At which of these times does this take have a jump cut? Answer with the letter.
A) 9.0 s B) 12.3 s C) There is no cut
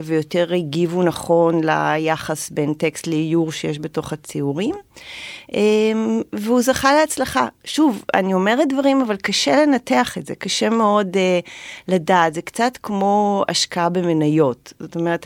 C